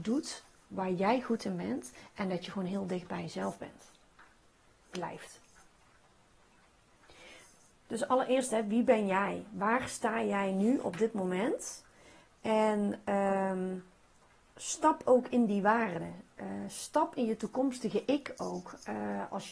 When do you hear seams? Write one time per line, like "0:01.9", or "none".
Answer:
none